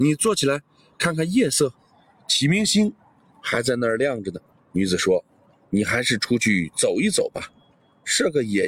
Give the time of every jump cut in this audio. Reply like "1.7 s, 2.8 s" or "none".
4.5 s